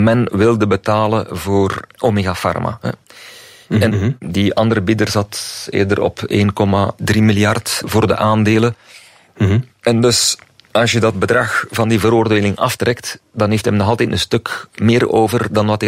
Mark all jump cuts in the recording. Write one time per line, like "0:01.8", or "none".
0:03.9
0:09.8